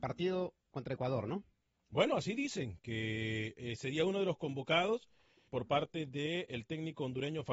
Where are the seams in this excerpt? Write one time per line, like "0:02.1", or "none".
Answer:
0:05.5